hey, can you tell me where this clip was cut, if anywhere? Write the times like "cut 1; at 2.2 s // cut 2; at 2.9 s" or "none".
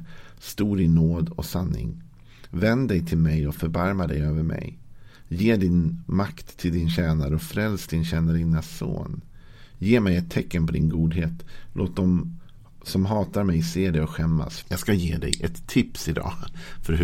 cut 1; at 14.6 s